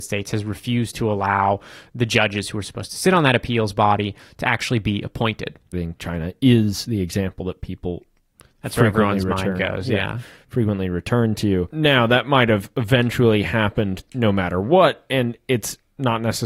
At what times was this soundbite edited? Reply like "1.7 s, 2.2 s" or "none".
5.7 s

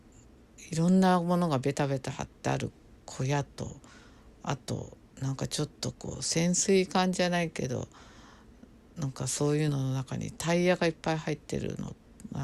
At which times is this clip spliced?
none

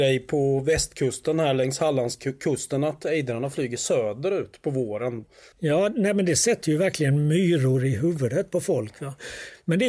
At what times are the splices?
5.5 s

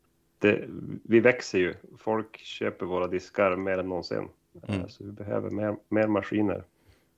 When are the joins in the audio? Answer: none

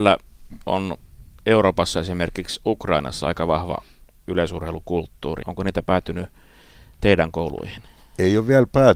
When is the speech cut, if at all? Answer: 5.4 s

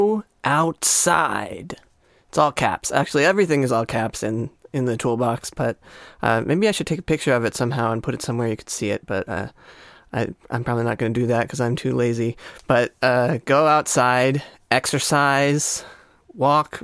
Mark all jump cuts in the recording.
none

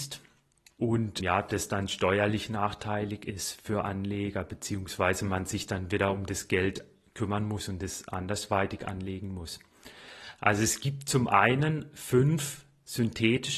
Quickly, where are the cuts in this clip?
1.2 s

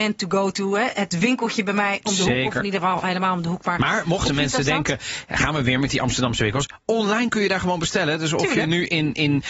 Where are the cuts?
none

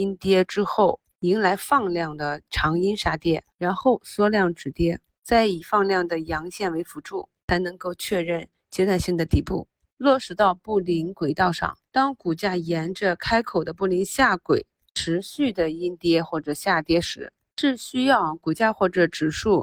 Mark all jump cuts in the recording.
11.9 s, 17.5 s

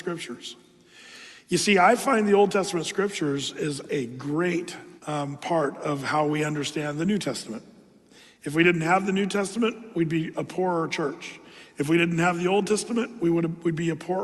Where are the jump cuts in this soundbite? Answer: 5.0 s

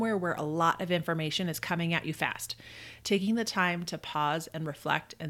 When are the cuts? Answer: none

